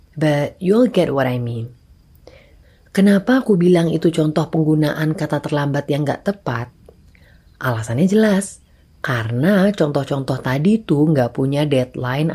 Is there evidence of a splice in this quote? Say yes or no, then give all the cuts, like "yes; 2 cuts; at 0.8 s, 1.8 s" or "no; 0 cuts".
no; 0 cuts